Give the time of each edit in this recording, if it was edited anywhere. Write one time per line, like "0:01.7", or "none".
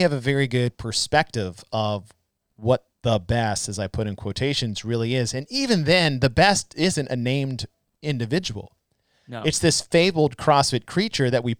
none